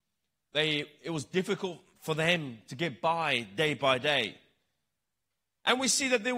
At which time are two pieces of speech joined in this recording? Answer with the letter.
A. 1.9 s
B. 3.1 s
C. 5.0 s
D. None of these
D